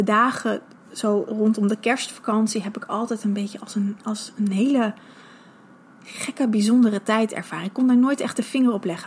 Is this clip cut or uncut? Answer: uncut